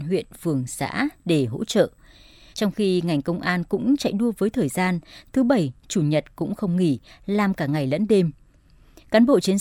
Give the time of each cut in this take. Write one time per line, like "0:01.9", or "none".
0:02.5